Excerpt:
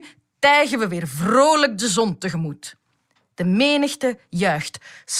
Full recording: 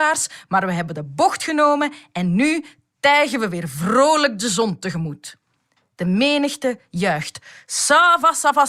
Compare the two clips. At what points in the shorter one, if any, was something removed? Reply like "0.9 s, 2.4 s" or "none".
none